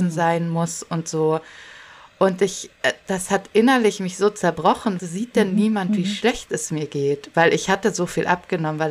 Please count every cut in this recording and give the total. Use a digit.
1